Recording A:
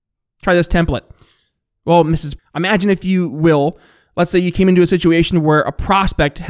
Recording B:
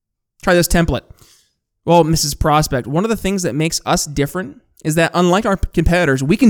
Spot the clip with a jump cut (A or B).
A